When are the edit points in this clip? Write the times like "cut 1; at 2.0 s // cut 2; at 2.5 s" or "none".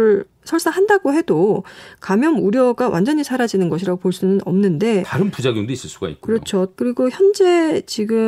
cut 1; at 6.7 s